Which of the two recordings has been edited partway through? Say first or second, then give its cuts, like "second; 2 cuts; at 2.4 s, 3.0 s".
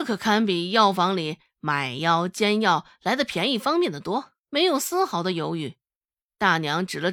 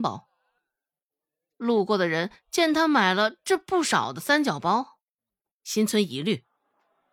first; 1 cut; at 4.4 s